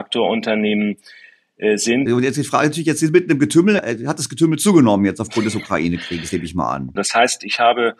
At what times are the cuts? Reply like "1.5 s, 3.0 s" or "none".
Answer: 2.1 s, 3.8 s, 7.0 s